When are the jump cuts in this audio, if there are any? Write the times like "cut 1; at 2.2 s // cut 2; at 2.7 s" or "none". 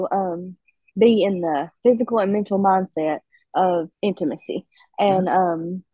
cut 1; at 0.9 s // cut 2; at 3.9 s